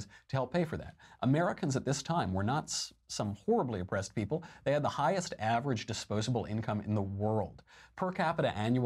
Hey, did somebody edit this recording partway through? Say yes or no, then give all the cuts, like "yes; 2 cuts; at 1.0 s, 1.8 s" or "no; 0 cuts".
no; 0 cuts